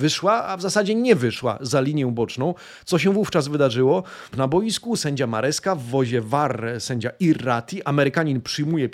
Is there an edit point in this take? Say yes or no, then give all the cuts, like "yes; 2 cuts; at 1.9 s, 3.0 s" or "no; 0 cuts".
yes; 1 cut; at 4.3 s